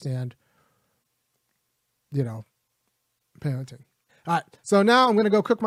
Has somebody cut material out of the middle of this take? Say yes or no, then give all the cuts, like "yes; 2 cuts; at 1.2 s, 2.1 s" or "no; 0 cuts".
yes; 1 cut; at 4.1 s